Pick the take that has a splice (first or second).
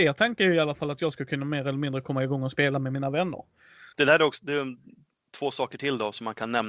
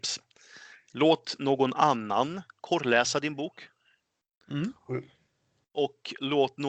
first